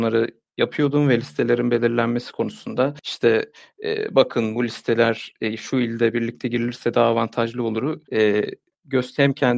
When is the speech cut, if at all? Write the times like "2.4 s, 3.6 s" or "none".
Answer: 8.0 s